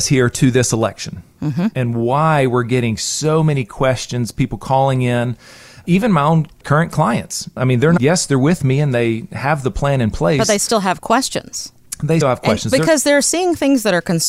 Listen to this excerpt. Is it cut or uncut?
cut